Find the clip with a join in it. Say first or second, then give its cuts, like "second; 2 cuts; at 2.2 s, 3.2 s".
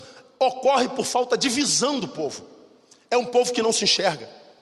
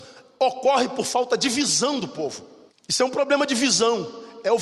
second; 1 cut; at 2.7 s